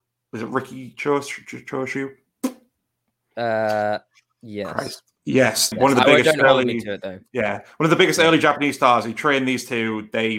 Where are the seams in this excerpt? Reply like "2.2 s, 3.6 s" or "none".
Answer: 5.7 s